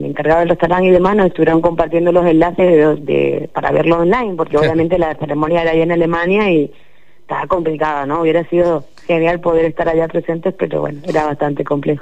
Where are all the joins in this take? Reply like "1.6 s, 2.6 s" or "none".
none